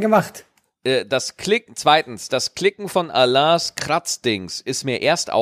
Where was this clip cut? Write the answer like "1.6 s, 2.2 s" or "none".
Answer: none